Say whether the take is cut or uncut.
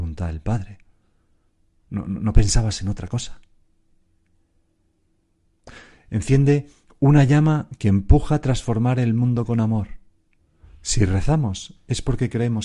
uncut